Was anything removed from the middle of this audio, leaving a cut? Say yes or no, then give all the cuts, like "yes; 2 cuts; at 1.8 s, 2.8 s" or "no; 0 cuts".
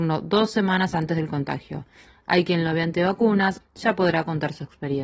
yes; 1 cut; at 3.6 s